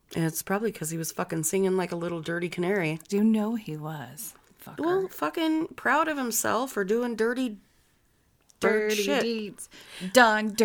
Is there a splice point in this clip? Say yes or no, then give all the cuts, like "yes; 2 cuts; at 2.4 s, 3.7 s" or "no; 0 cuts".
yes; 1 cut; at 3.1 s